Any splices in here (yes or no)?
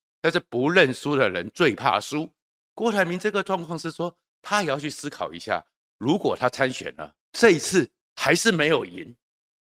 yes